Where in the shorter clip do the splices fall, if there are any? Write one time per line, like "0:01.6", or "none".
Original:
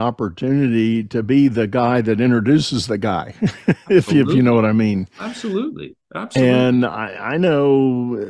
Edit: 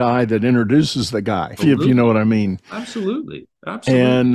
0:01.6